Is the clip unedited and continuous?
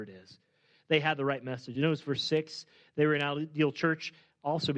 yes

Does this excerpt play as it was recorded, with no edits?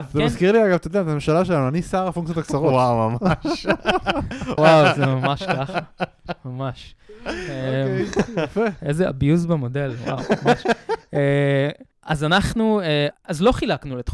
no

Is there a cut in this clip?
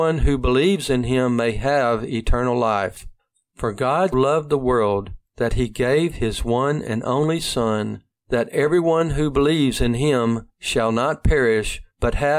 yes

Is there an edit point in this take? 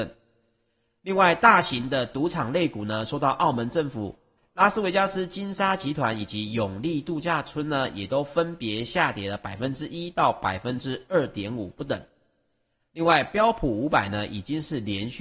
yes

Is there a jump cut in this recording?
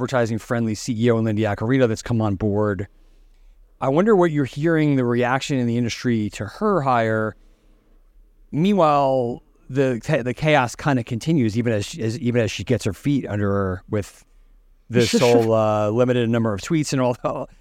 no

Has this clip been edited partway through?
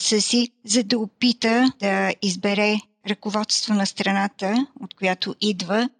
no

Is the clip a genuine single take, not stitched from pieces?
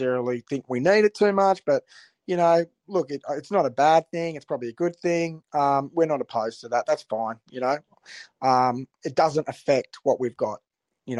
yes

